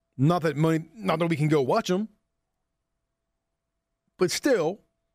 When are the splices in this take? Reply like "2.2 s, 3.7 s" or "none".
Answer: none